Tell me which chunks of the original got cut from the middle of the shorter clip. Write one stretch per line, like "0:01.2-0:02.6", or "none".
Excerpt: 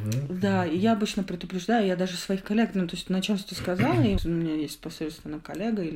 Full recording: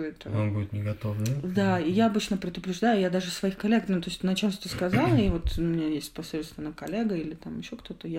0:05.3-0:05.5

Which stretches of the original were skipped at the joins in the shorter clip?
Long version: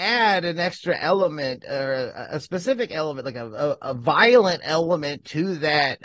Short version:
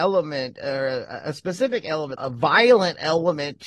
0:03.2-0:03.8

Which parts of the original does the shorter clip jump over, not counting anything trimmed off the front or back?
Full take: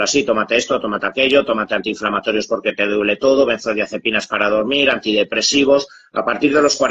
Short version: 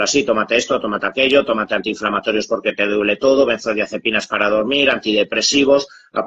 none

